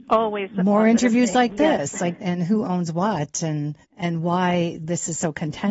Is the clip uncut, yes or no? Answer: no